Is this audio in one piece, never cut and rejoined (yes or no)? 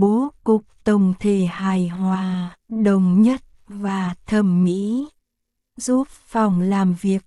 no